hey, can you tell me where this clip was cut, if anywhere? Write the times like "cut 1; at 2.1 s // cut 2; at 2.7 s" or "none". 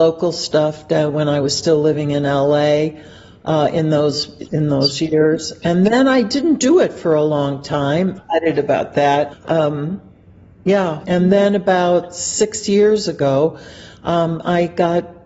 cut 1; at 8.2 s // cut 2; at 9.3 s // cut 3; at 11.0 s